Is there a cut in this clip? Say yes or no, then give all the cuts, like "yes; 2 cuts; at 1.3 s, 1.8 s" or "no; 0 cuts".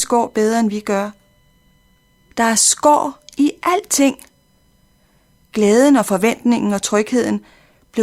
yes; 1 cut; at 2.3 s